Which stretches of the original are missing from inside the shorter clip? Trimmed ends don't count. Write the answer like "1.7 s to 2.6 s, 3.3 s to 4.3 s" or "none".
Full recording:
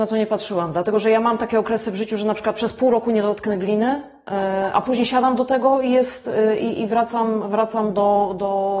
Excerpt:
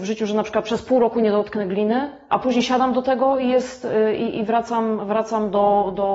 4.2 s to 4.7 s